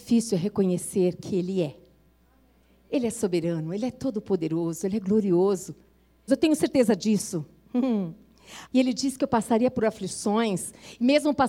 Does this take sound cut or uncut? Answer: cut